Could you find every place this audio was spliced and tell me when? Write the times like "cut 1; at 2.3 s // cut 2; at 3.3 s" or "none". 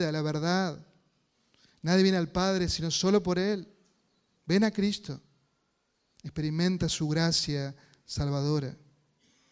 none